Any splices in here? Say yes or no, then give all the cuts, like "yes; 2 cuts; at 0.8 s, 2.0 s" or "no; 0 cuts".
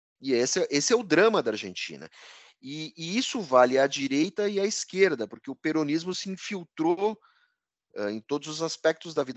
no; 0 cuts